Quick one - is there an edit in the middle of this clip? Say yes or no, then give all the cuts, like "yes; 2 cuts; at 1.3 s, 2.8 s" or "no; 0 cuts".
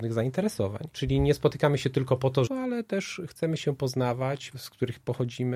yes; 2 cuts; at 2.5 s, 4.5 s